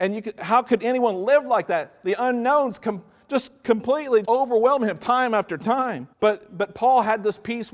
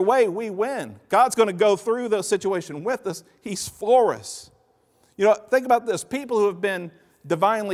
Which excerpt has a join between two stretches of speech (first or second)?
first